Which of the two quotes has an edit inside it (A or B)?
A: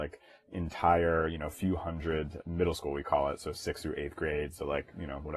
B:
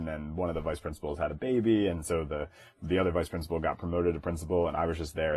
A